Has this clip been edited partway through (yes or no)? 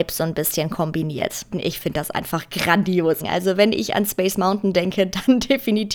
yes